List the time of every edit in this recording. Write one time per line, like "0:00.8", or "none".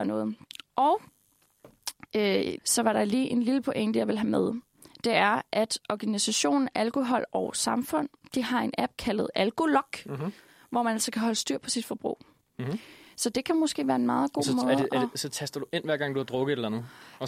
0:02.6